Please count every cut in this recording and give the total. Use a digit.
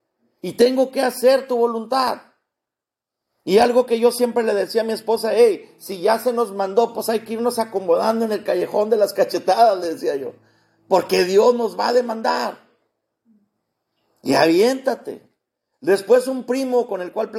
0